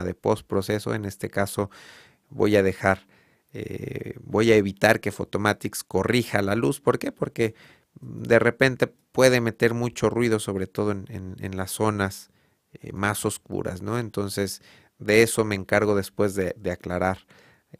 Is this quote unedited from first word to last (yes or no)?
yes